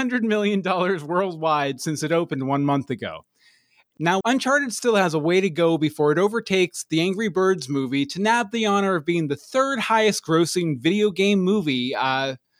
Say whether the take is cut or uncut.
cut